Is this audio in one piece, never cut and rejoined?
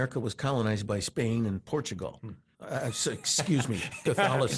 no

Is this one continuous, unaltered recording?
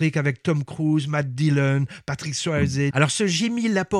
no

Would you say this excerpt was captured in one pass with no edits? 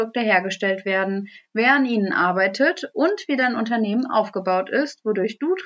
yes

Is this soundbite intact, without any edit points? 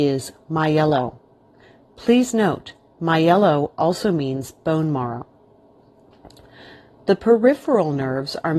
yes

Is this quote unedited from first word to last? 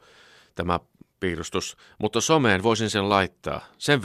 yes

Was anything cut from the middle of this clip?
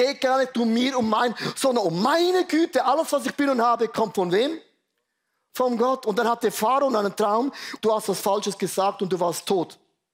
yes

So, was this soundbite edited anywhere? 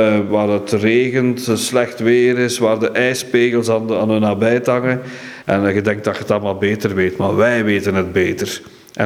yes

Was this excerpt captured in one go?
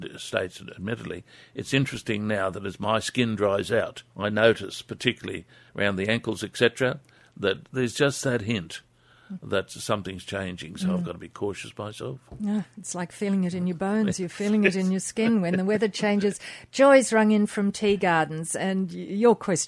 no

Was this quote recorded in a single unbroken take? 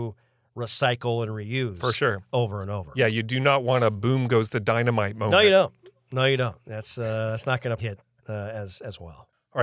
no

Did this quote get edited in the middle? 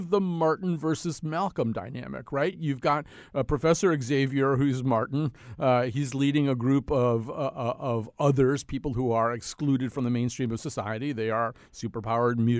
no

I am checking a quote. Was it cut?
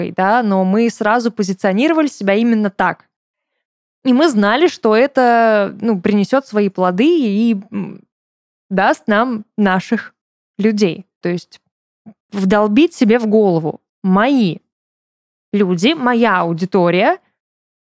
yes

